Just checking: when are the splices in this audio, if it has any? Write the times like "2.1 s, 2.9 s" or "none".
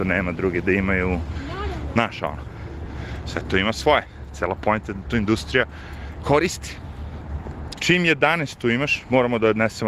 7.7 s